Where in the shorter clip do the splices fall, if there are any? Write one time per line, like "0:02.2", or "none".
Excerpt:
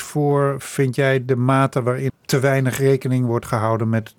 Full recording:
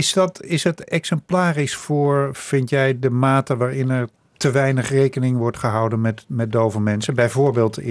0:02.1